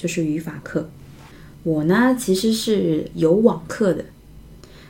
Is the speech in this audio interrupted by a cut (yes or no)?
no